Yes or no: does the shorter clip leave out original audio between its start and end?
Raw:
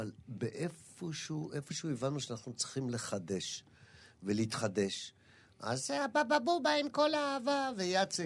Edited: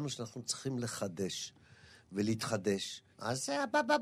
yes